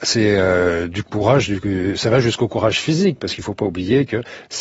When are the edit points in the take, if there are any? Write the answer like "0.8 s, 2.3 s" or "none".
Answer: none